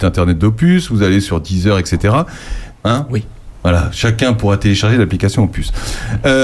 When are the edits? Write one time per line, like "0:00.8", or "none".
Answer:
0:02.7